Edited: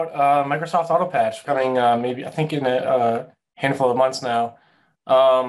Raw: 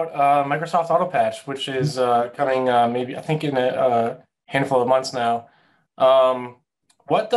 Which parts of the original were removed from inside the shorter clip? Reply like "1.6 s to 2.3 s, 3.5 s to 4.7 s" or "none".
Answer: 1.4 s to 2.4 s